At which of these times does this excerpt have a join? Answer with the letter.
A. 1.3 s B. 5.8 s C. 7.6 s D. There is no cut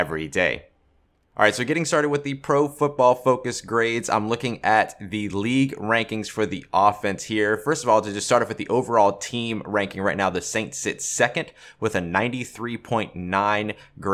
D